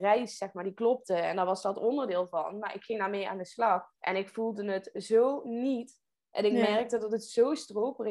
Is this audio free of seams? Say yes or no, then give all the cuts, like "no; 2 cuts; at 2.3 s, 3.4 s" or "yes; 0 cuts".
no; 1 cut; at 3.9 s